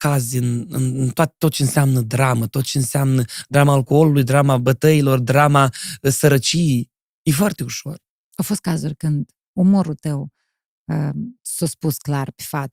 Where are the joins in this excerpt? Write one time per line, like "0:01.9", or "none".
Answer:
none